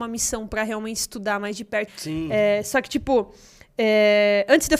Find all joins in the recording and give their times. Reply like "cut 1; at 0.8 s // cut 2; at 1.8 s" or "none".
cut 1; at 1.9 s